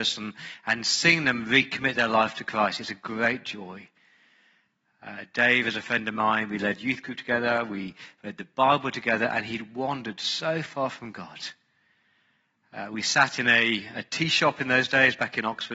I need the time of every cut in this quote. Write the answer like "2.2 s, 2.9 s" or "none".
none